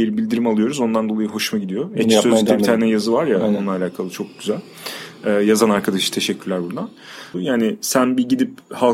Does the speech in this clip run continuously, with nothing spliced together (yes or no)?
no